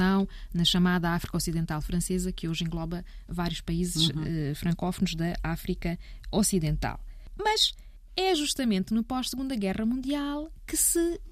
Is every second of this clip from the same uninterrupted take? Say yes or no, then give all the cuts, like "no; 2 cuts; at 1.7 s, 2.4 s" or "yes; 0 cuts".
yes; 0 cuts